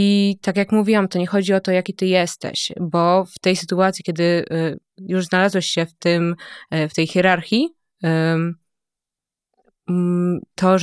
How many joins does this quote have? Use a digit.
0